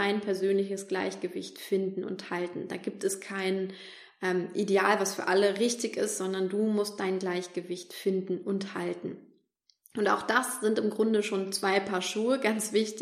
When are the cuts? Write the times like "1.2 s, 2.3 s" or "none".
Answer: none